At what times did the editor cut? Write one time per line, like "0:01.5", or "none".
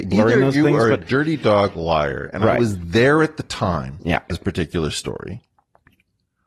0:04.3